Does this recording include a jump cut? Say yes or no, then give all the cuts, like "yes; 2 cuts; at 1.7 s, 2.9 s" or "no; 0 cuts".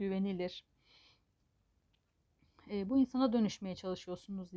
no; 0 cuts